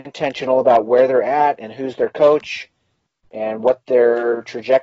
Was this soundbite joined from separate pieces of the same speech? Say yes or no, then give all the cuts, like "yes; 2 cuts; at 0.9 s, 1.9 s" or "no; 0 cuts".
no; 0 cuts